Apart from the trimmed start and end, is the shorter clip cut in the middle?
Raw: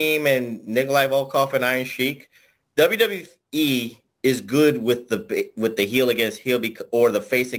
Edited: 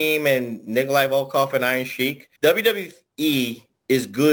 yes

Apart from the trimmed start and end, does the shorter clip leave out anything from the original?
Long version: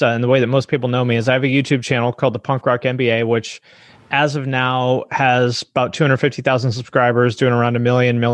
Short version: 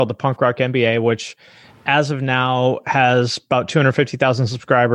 no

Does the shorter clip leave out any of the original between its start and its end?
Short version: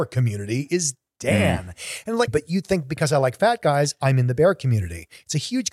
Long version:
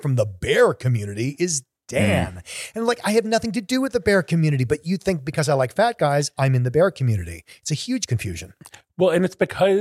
yes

